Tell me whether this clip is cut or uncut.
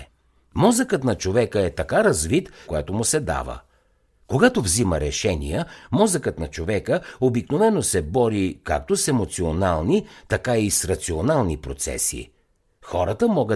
cut